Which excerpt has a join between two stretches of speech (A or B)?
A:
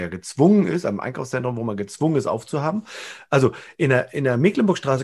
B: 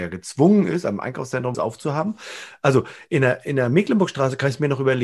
B